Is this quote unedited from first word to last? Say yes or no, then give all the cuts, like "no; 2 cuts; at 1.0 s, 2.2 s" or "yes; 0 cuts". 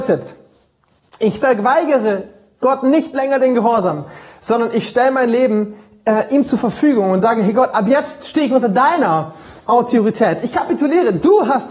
yes; 0 cuts